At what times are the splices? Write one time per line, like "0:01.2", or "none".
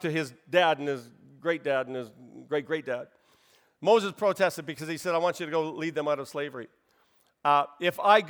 none